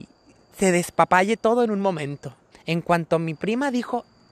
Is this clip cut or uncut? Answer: cut